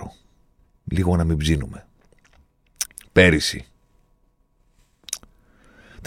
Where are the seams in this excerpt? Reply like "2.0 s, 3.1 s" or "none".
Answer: 3.0 s